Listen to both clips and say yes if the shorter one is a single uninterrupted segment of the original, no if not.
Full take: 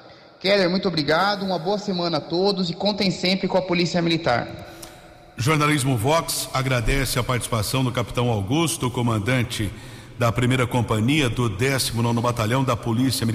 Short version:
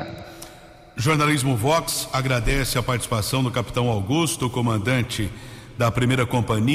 yes